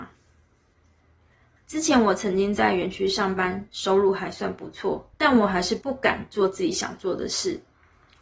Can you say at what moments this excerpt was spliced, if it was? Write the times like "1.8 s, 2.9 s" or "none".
1.6 s, 5.1 s